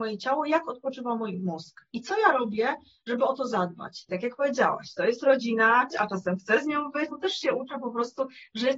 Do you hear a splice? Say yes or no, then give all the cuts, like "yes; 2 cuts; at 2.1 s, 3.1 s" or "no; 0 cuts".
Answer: yes; 3 cuts; at 4.1 s, 5.9 s, 7.1 s